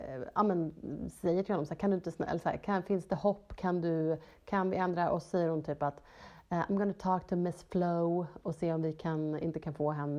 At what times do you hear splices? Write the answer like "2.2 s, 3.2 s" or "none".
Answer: none